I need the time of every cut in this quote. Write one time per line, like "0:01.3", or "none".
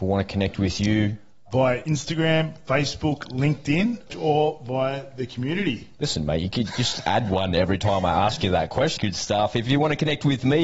0:09.0